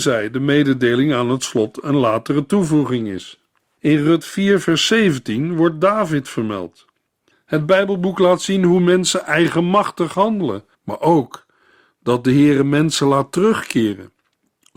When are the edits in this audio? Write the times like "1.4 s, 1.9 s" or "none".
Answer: 3.8 s, 7.3 s, 10.7 s